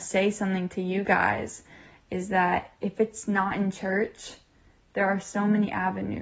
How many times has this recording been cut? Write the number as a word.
one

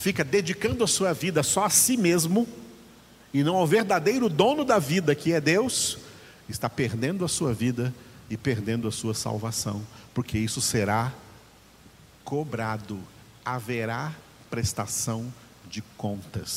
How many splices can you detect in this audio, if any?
zero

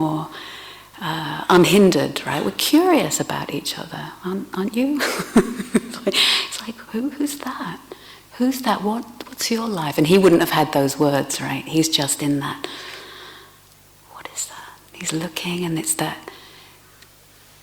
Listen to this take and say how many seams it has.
two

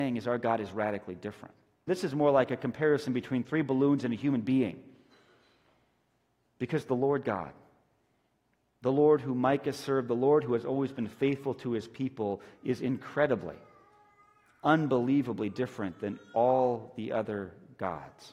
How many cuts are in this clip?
one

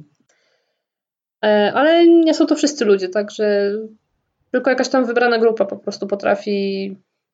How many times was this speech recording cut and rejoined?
zero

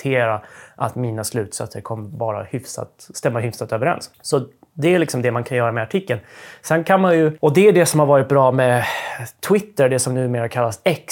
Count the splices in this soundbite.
zero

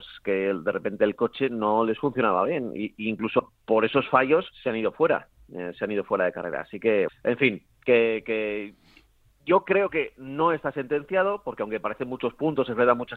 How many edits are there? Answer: two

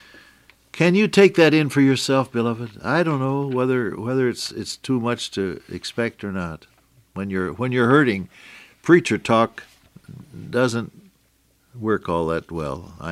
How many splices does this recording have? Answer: zero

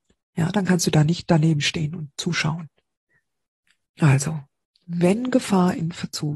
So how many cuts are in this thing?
one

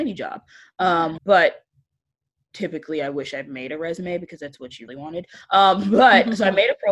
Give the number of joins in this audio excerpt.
two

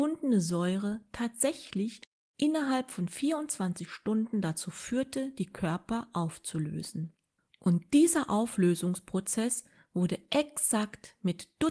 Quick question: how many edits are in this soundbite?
zero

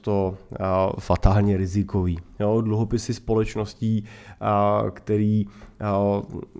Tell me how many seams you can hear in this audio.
zero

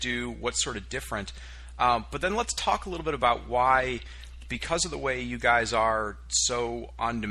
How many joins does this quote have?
zero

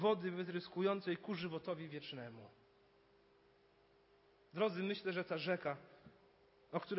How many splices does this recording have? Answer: zero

